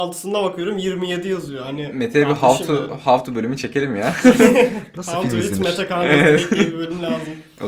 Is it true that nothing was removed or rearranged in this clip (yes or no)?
yes